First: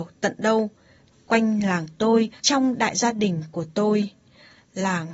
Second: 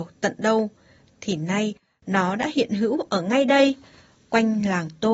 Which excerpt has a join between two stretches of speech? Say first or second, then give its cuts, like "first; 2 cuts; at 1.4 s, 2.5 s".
first; 2 cuts; at 1.1 s, 2.4 s